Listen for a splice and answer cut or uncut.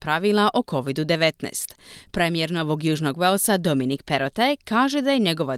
uncut